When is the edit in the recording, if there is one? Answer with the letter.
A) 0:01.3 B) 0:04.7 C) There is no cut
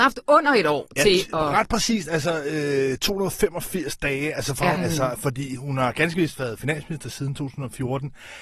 B